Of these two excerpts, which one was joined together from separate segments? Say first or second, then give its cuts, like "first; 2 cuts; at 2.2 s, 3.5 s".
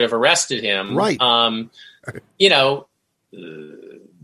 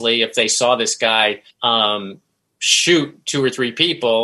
second; 1 cut; at 1.5 s